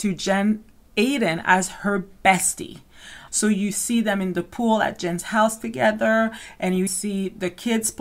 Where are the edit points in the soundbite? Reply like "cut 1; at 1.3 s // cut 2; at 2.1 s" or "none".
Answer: cut 1; at 3.3 s // cut 2; at 6.9 s